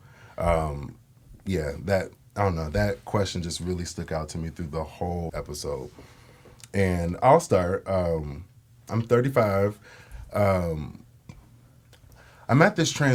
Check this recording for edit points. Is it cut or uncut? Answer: cut